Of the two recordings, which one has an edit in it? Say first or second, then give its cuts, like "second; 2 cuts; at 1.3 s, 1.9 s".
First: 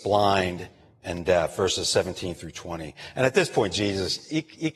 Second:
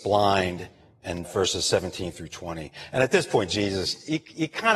second; 1 cut; at 1.2 s